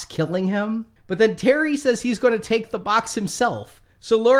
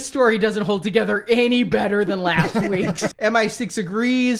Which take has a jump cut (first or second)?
second